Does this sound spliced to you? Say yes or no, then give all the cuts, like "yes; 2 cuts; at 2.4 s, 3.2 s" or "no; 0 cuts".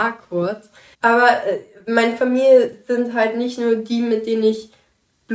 yes; 1 cut; at 0.9 s